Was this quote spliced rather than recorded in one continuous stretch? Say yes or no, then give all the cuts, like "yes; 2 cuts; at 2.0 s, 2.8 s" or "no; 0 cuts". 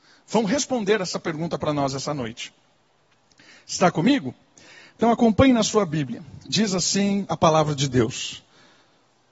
no; 0 cuts